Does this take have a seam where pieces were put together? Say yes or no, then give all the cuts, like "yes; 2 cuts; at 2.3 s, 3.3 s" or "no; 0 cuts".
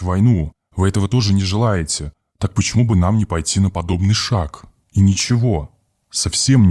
yes; 1 cut; at 4.8 s